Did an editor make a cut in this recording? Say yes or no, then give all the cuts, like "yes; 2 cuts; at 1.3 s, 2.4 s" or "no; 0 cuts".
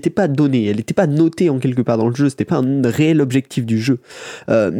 no; 0 cuts